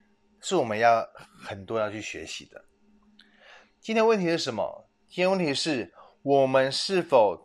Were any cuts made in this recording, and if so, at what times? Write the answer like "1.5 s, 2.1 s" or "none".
none